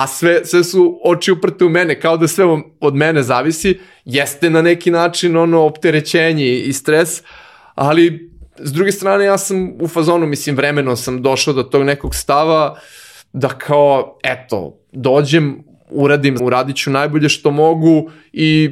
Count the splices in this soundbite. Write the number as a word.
one